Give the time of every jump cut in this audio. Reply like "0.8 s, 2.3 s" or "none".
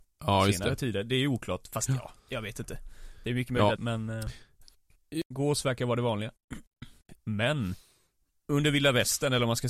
3.8 s, 7.2 s